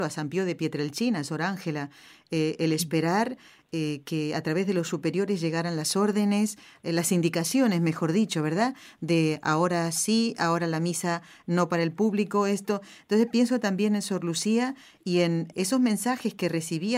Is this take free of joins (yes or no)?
no